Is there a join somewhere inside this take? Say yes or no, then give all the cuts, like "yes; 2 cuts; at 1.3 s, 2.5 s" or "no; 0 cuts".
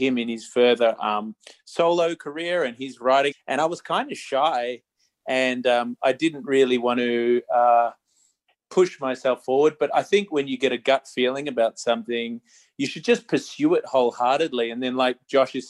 yes; 1 cut; at 3.3 s